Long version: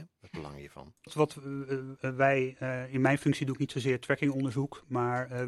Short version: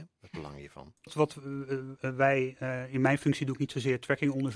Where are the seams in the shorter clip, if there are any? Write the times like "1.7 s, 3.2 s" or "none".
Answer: none

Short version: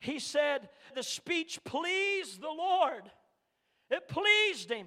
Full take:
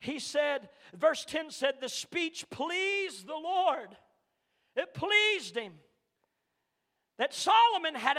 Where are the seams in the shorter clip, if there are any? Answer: 0.9 s

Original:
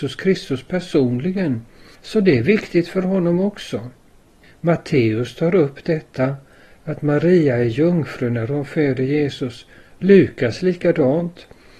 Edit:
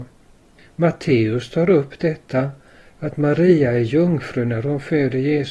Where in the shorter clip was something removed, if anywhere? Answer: none

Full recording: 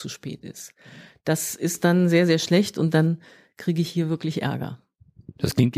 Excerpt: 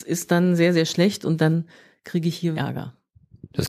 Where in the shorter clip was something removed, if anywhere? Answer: 2.5 s

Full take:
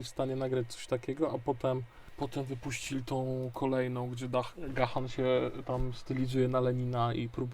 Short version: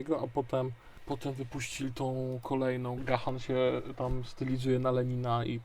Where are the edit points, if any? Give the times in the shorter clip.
3.0 s

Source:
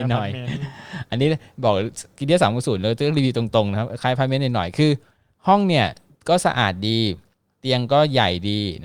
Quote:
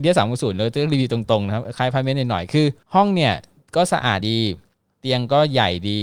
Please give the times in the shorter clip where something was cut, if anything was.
2.8 s, 4.2 s

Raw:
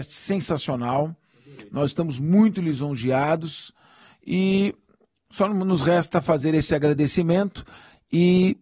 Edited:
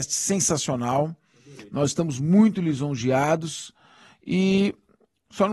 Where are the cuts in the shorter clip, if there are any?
none

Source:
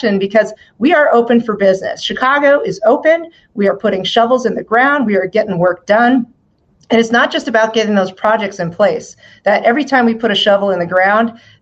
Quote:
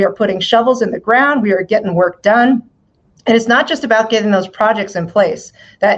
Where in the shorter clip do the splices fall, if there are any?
none

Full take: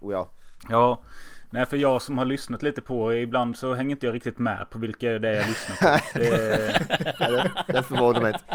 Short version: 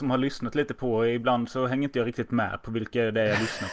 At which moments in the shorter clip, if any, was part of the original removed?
none

